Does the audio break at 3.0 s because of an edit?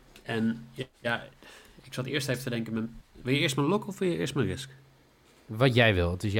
yes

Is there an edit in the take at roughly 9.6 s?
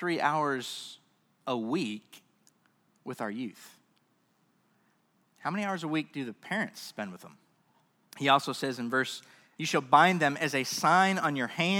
yes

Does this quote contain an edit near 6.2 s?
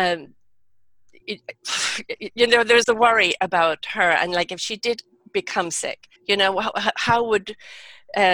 yes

